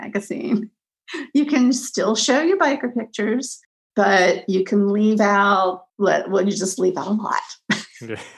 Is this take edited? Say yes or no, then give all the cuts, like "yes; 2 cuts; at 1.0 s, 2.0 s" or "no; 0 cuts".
no; 0 cuts